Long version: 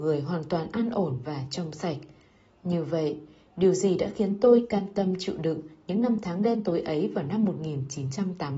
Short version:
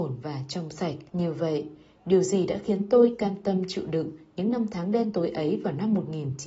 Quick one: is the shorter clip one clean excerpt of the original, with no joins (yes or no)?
no